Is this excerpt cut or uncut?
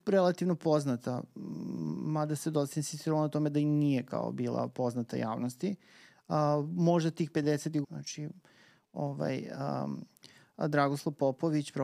cut